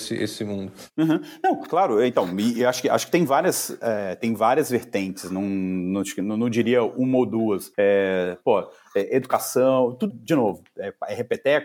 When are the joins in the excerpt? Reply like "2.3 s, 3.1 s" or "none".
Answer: 7.7 s, 10.1 s